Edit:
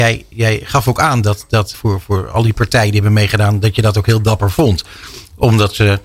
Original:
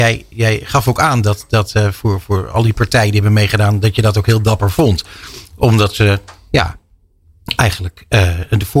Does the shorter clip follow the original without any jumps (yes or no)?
no